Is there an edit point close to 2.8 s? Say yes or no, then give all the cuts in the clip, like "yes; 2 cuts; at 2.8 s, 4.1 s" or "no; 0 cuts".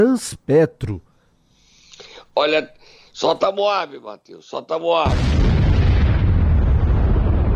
no; 0 cuts